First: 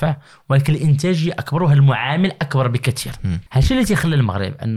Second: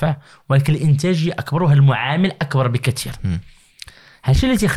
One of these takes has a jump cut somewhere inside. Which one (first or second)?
first